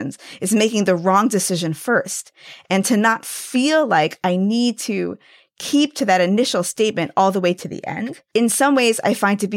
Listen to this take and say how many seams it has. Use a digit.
0